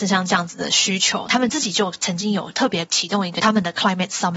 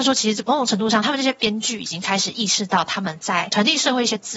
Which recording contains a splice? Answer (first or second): first